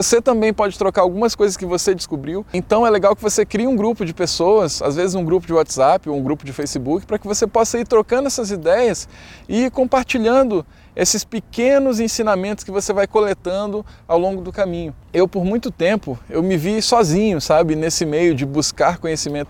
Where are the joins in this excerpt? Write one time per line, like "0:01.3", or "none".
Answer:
none